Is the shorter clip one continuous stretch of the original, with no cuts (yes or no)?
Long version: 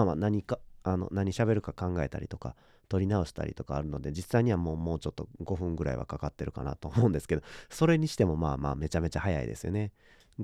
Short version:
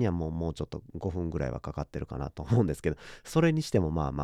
yes